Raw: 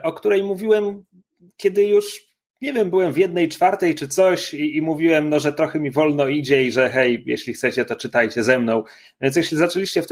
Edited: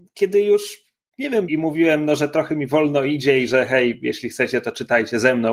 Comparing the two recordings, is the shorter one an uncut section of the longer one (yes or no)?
no